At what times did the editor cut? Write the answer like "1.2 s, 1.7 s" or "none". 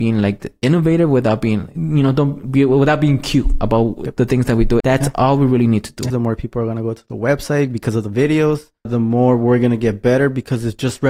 4.8 s, 6.1 s, 8.9 s